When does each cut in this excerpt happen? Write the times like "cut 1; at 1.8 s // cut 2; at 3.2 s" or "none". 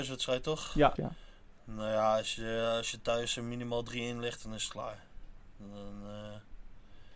cut 1; at 1.0 s